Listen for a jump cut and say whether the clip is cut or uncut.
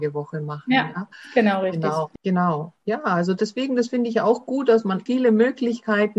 cut